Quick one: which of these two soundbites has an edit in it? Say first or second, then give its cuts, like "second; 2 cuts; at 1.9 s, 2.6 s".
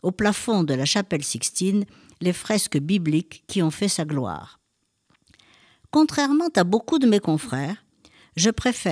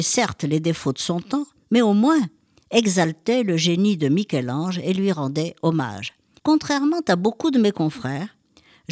second; 1 cut; at 6.4 s